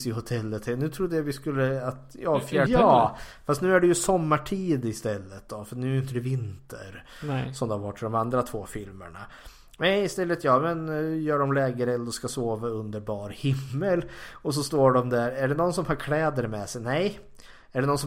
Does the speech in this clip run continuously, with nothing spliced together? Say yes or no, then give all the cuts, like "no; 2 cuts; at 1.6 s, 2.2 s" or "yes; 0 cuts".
no; 1 cut; at 2.7 s